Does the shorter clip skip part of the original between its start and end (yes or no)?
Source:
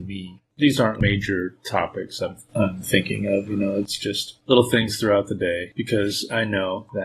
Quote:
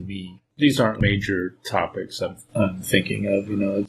no